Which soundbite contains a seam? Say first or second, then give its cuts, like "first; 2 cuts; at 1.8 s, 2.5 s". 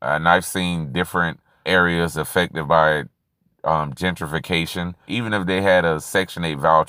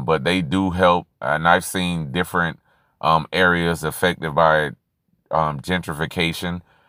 first; 2 cuts; at 1.6 s, 5.1 s